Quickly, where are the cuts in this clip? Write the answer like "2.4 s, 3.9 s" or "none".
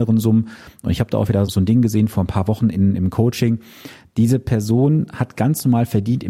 1.4 s